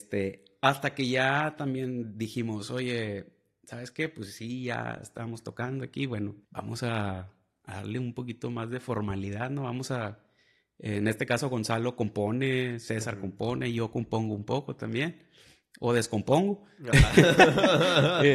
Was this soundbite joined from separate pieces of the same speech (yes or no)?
yes